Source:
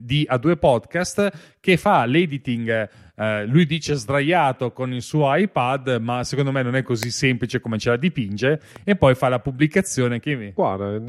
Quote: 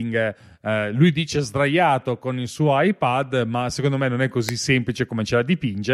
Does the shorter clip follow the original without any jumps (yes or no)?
yes